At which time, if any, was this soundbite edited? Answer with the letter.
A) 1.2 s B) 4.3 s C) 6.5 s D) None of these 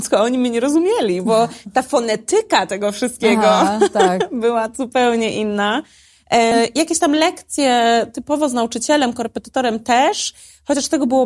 C